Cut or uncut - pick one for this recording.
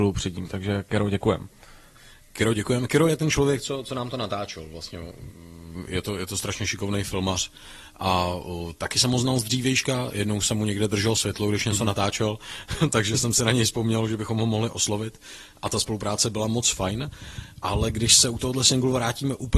uncut